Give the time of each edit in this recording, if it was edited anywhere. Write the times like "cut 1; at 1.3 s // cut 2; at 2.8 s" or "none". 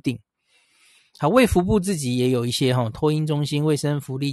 cut 1; at 1.0 s